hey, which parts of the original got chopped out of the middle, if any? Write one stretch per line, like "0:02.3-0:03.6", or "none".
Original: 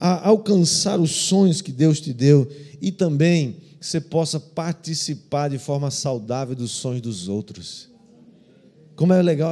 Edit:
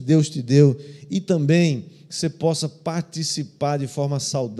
none